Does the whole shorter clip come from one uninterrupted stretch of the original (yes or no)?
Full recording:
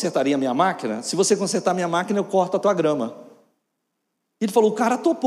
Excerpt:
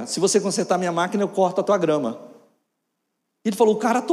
yes